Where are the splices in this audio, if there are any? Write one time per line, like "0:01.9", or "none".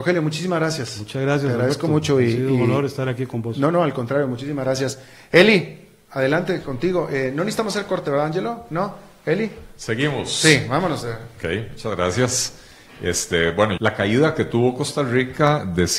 0:13.8